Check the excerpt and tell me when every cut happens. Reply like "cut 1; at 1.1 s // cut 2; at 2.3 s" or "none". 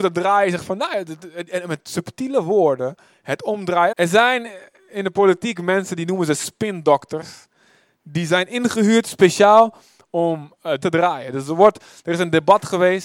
cut 1; at 3.9 s // cut 2; at 10.8 s